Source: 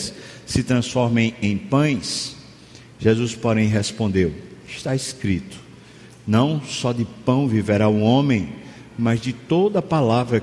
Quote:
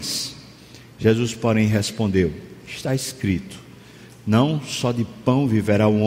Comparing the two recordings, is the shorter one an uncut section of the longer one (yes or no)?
yes